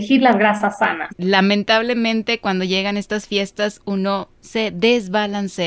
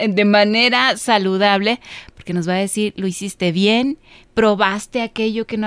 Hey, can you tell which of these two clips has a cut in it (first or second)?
first